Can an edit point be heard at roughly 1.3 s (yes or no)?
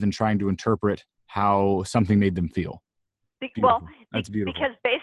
no